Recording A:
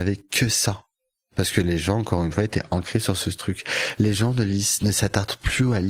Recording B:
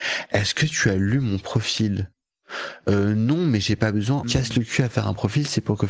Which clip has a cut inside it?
B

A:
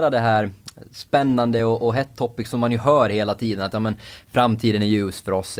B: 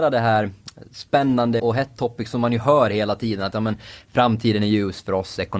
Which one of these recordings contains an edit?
B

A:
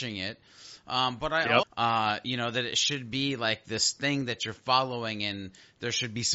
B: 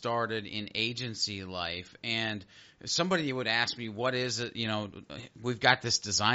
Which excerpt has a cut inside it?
A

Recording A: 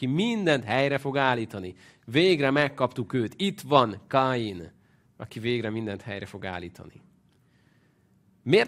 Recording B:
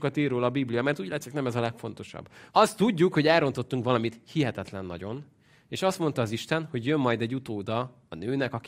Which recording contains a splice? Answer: B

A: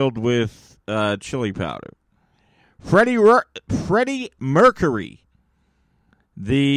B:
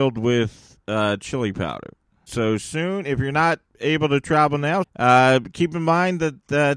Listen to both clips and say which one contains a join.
B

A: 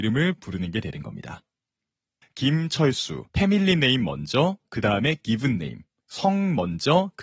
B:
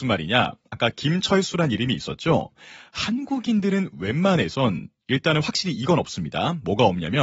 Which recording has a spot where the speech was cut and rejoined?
A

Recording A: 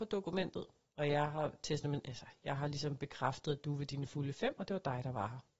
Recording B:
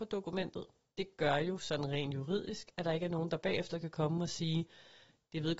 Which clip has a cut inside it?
A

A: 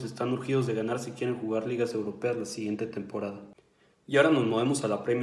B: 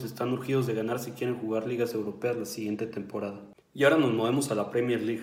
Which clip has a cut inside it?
B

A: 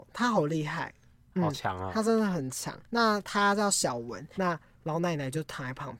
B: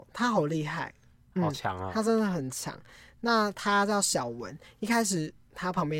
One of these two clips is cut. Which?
A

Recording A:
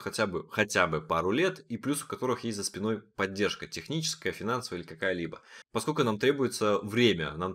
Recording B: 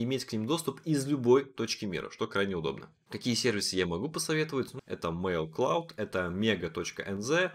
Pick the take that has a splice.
B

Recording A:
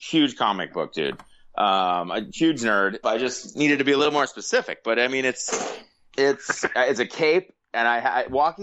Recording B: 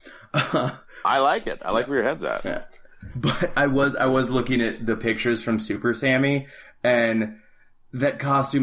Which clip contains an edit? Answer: A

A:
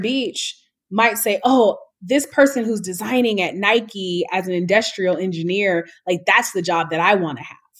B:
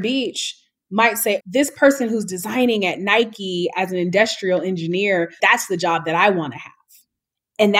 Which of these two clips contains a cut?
B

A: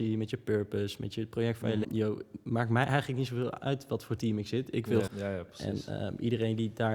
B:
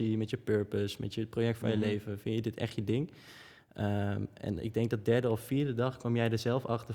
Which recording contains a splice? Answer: A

